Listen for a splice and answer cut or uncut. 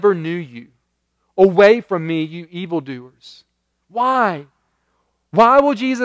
uncut